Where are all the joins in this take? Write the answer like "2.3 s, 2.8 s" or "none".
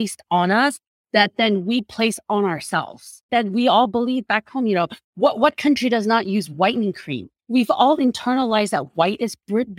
3.3 s